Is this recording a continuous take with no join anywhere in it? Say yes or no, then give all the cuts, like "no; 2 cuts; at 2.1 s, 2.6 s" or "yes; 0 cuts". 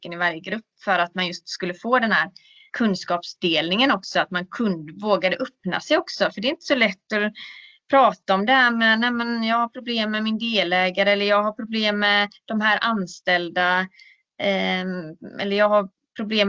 no; 1 cut; at 2.7 s